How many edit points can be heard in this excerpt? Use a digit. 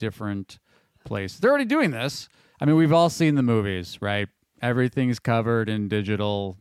1